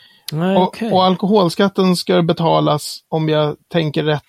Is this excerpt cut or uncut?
uncut